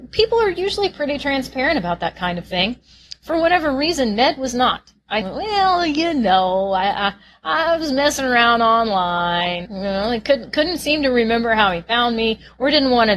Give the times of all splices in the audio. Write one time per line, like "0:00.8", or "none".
0:05.2
0:09.7